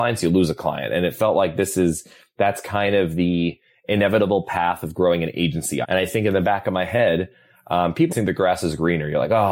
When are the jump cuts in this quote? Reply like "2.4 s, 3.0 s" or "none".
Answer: 5.8 s, 8.1 s